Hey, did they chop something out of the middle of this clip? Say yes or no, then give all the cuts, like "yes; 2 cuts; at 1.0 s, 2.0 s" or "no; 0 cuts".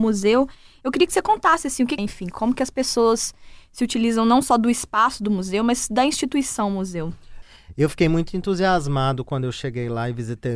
yes; 1 cut; at 2.0 s